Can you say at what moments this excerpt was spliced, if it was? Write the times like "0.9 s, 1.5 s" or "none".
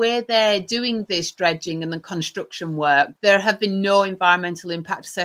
3.2 s